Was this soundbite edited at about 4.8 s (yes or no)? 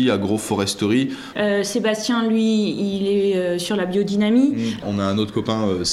yes